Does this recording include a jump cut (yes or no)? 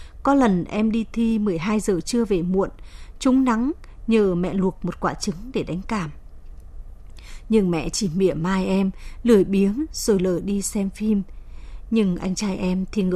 no